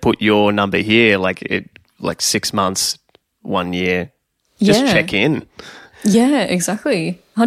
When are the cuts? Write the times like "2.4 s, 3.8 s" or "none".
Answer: none